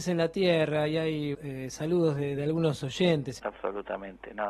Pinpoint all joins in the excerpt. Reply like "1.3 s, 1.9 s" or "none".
1.3 s, 3.4 s